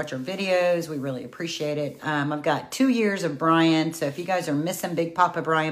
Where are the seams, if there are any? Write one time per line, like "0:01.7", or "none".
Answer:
0:02.0